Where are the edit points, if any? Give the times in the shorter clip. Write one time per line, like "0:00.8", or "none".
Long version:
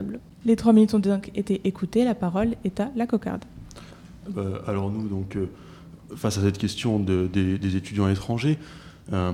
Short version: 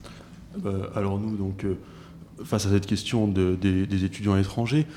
none